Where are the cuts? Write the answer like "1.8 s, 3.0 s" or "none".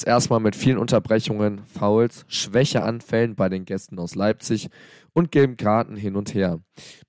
none